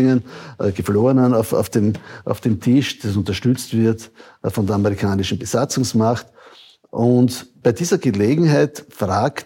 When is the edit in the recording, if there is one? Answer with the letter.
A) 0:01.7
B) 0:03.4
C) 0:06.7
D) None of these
D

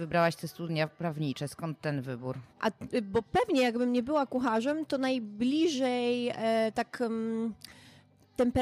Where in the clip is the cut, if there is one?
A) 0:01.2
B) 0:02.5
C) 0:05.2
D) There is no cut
B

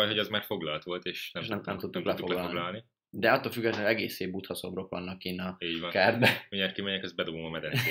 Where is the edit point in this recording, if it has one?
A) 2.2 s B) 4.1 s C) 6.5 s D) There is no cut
D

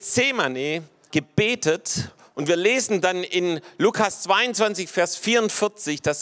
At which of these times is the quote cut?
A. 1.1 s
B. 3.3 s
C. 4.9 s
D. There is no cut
A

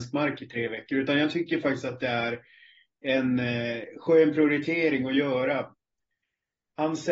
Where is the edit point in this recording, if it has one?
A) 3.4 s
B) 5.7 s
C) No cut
C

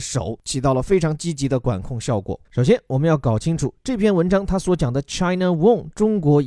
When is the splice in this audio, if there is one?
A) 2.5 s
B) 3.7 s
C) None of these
A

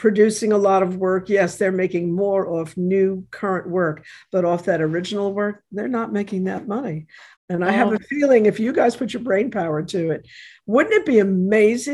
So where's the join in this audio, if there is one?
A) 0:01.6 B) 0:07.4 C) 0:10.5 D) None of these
B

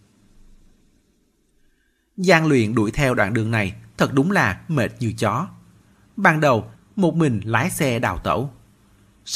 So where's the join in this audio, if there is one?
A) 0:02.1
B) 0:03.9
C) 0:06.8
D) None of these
C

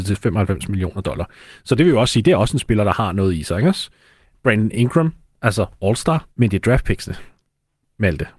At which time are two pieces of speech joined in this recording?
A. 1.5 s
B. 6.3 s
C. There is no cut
B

